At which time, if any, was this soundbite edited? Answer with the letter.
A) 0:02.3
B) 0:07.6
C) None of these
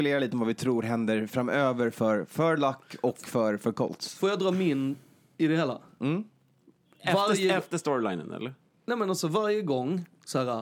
C